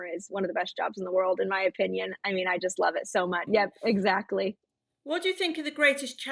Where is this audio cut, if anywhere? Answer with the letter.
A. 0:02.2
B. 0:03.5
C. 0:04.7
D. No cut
B